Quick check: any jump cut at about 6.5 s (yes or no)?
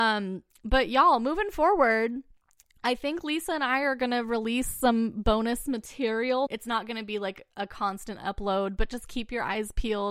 yes